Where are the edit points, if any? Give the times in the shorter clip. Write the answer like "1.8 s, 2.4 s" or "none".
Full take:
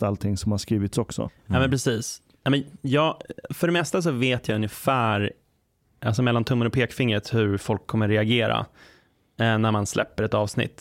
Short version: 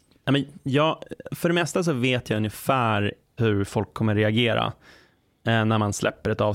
3.4 s